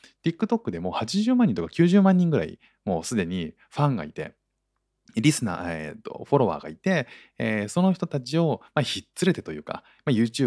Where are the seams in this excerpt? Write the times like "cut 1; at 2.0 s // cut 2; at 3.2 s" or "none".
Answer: none